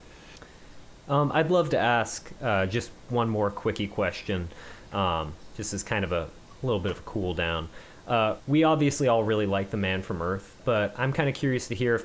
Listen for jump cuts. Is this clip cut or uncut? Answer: cut